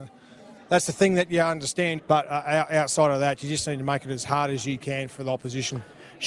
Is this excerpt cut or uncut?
cut